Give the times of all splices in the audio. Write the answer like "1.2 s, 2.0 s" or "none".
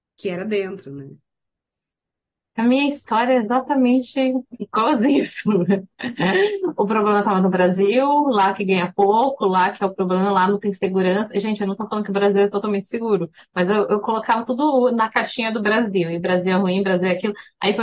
none